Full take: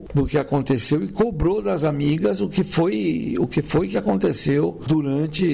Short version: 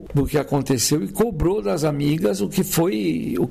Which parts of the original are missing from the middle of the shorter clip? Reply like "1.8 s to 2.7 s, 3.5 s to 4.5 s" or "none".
none